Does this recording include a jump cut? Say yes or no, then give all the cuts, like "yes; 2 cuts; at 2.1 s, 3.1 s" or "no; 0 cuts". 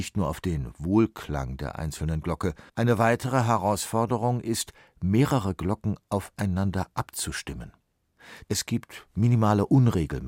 yes; 2 cuts; at 2.7 s, 8.4 s